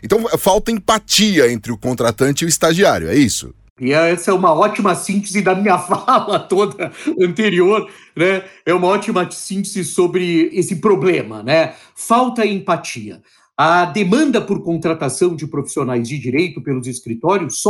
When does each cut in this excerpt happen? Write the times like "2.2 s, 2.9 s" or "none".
none